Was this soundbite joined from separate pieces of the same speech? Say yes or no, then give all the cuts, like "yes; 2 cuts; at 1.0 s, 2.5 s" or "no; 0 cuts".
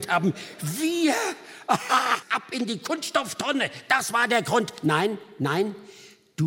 yes; 1 cut; at 2.2 s